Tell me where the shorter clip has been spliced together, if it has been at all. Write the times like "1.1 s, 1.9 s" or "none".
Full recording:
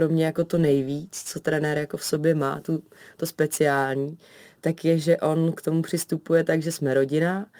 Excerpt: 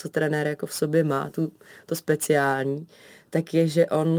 none